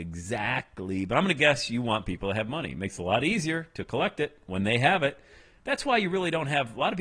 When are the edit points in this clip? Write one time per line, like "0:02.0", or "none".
0:05.6

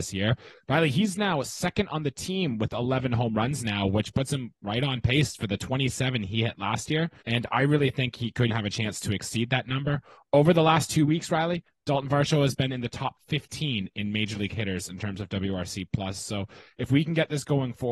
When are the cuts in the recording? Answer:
0:07.2
0:08.5

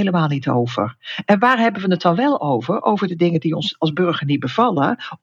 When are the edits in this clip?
none

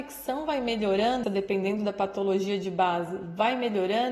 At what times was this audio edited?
0:01.2

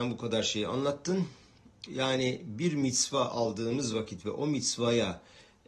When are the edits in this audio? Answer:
0:01.9

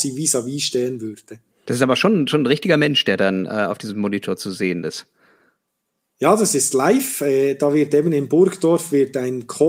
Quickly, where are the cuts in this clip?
0:01.7

